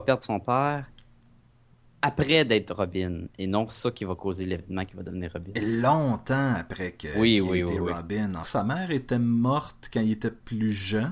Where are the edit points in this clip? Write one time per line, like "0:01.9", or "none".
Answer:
0:08.4

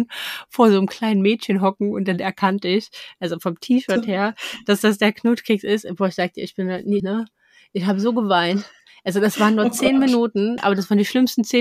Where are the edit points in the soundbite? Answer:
0:07.0
0:10.6

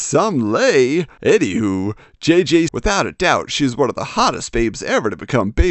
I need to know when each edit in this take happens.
0:02.7

